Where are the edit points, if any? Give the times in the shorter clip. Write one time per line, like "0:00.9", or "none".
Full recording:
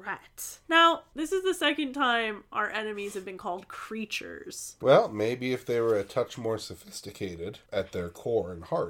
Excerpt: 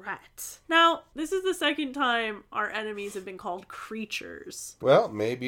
none

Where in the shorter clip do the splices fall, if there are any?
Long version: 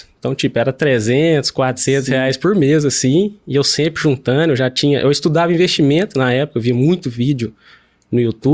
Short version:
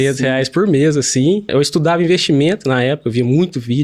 0:01.5

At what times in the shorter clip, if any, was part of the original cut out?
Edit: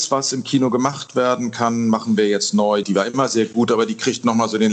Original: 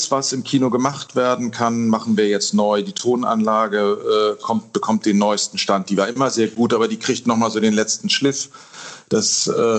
0:02.8

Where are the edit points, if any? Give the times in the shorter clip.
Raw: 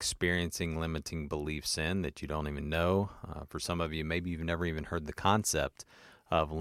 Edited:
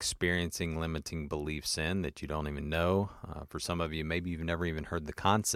none

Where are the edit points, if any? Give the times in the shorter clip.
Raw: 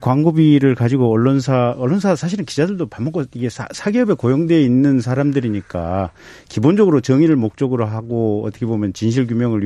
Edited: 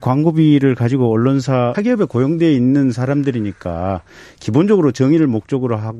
0:01.7

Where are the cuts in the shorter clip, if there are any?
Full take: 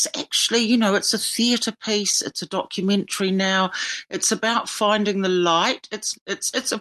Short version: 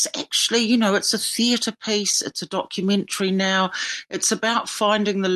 none

